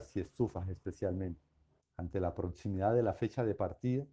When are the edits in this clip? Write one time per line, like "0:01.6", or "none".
0:01.8